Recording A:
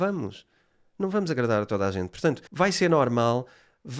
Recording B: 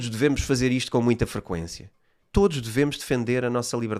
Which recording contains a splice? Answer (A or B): A